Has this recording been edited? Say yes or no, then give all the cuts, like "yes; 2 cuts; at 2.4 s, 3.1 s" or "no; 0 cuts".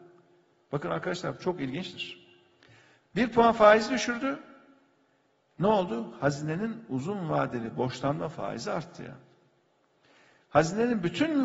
yes; 1 cut; at 3.0 s